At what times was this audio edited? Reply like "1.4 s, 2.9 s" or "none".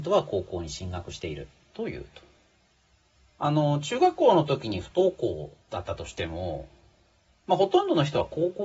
1.7 s, 5.6 s